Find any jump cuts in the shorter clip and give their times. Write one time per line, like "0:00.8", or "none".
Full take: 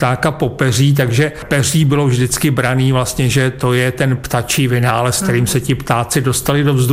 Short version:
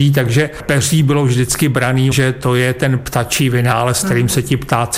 0:02.1